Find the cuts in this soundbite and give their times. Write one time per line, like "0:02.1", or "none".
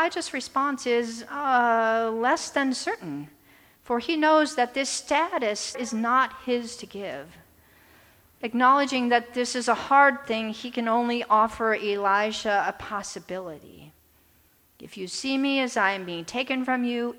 0:05.7